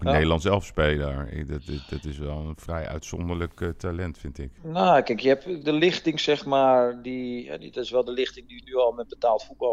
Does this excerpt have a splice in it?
yes; 1 cut; at 5.6 s

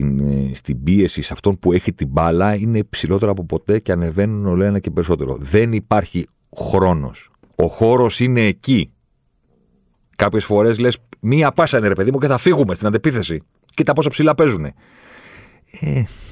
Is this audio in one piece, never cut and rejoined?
yes; 0 cuts

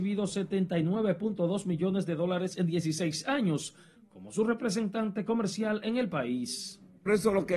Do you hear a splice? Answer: yes; 1 cut; at 4.0 s

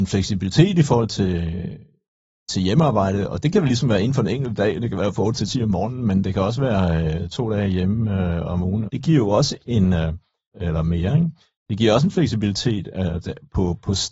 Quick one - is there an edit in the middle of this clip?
yes; 2 cuts; at 8.9 s, 10.5 s

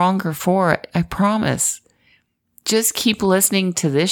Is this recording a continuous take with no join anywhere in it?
yes; 0 cuts

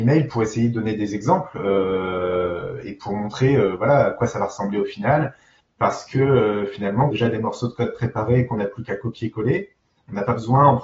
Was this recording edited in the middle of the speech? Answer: yes; 2 cuts; at 5.6 s, 7.1 s

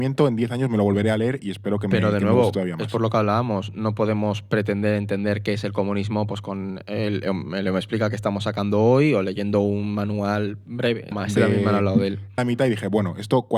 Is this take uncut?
no; 2 cuts; at 11.1 s, 12.4 s

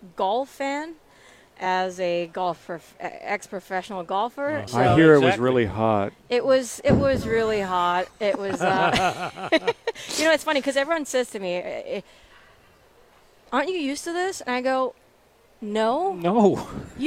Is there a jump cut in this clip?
yes; 1 cut; at 4.7 s

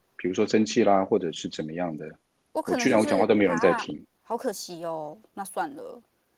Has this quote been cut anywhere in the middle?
no; 0 cuts

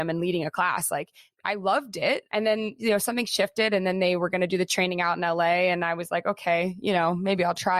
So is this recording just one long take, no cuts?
no; 1 cut; at 2.3 s

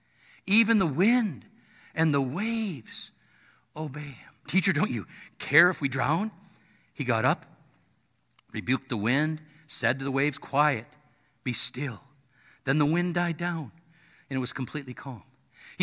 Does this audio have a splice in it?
yes; 1 cut; at 4.5 s

